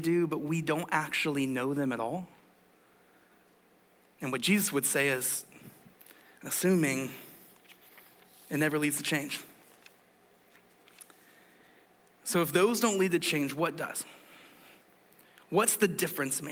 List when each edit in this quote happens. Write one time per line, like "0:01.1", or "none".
none